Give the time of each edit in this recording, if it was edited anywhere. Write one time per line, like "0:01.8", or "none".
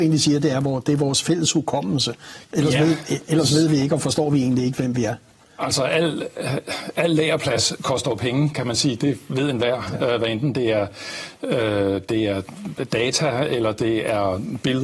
0:02.4

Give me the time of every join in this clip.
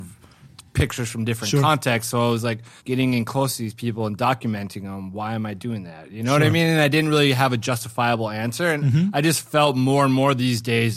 0:02.8

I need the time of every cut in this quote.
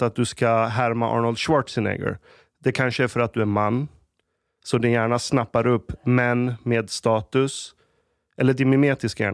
none

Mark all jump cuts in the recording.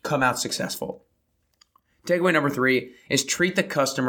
none

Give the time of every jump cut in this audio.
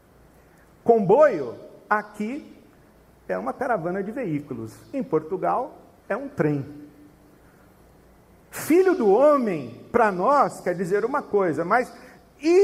none

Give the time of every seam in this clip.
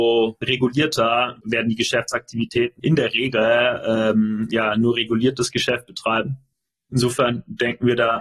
0:02.8

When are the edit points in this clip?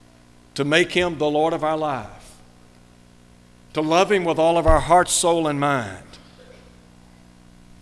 none

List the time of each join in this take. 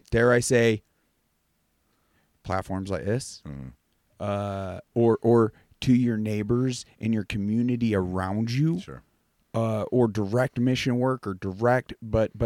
0:04.9

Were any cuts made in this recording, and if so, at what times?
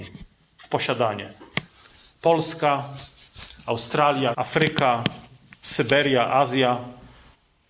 0:04.3

